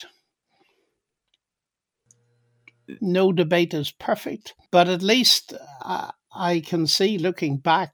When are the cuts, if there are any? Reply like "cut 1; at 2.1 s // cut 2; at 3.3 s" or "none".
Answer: cut 1; at 3.0 s // cut 2; at 4.6 s

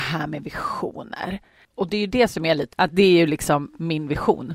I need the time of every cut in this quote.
cut 1; at 1.7 s // cut 2; at 2.7 s

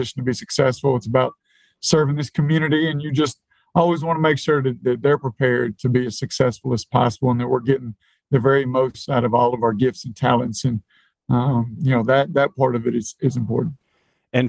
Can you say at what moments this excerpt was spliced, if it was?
none

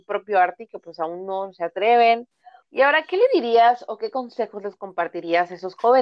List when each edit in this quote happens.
cut 1; at 2.6 s

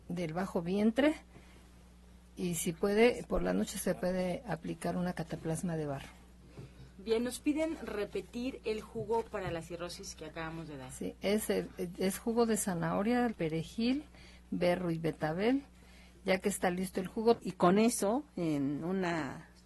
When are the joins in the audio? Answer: cut 1; at 10.1 s // cut 2; at 13.3 s // cut 3; at 17.4 s

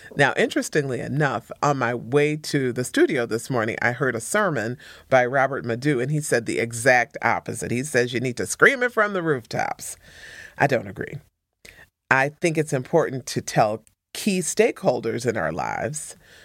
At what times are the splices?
cut 1; at 1.6 s

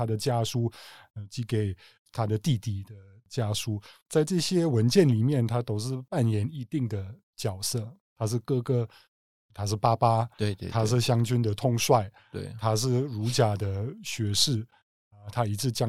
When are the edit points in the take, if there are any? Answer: none

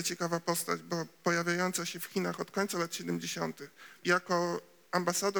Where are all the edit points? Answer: cut 1; at 4.0 s

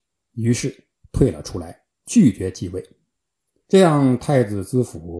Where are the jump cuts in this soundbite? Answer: none

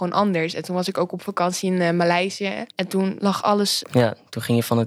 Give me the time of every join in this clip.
cut 1; at 2.7 s // cut 2; at 3.8 s

